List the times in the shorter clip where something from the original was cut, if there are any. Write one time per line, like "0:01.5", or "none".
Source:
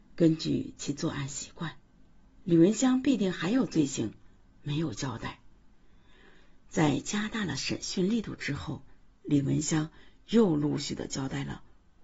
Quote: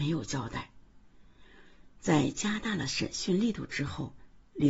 none